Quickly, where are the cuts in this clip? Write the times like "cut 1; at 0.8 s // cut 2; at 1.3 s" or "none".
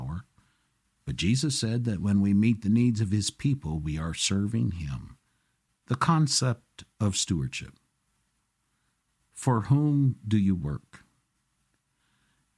cut 1; at 5.7 s